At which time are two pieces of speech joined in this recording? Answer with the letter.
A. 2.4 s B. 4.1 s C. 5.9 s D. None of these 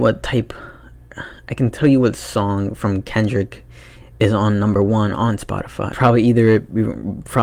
C